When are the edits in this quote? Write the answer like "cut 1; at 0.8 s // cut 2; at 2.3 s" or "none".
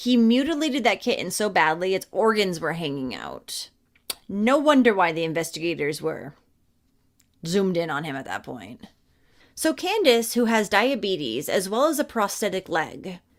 cut 1; at 9.4 s